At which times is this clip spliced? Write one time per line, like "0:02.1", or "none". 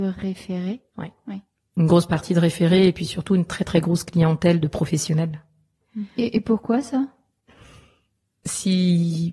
0:06.2